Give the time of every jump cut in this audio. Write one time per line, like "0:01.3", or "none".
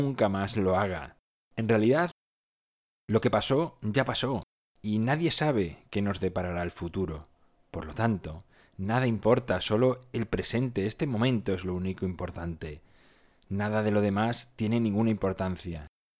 none